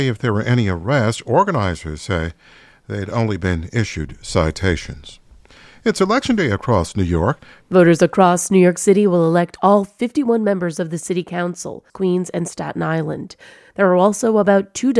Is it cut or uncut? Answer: cut